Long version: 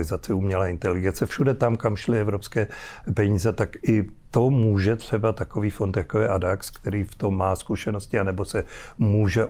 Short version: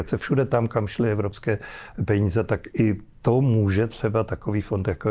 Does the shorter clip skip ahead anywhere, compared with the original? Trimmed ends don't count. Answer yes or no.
no